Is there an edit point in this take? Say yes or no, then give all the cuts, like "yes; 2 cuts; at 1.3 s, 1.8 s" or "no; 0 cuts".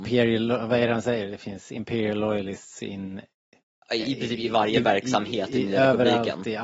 no; 0 cuts